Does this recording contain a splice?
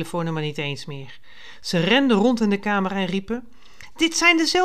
no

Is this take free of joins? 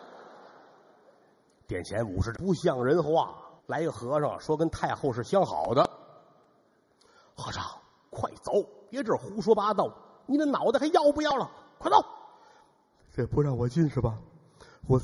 no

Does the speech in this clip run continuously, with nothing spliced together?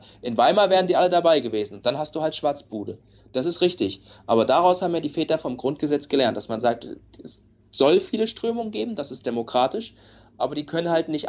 yes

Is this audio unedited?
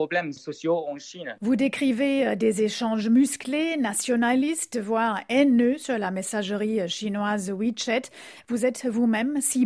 yes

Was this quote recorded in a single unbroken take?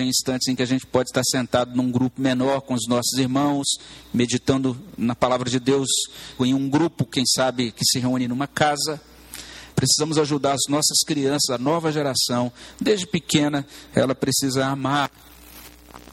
no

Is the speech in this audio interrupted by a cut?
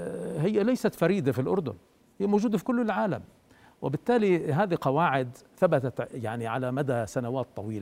no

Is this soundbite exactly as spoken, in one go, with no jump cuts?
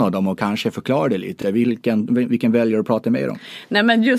yes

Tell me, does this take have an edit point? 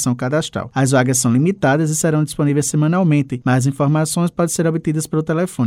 no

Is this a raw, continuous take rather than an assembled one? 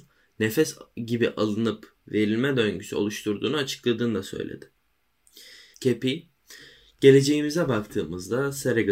no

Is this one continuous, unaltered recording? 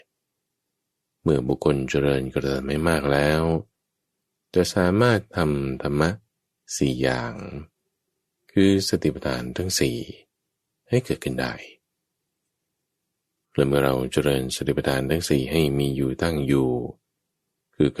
yes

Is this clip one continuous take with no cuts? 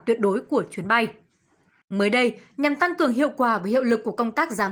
yes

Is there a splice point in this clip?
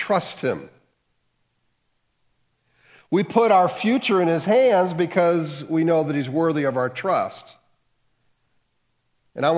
no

